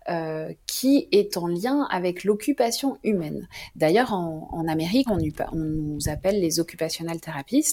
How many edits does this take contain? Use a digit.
1